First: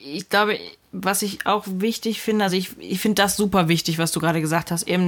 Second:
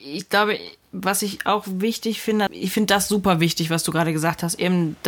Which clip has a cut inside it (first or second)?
second